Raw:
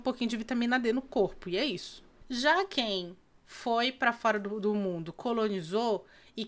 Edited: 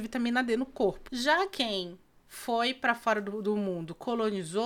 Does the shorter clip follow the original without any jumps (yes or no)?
no